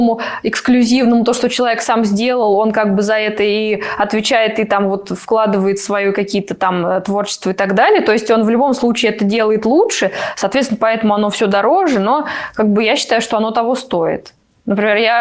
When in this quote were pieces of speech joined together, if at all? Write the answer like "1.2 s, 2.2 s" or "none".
none